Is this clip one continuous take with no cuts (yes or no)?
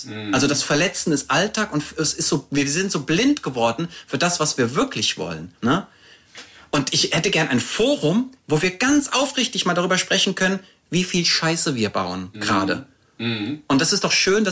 no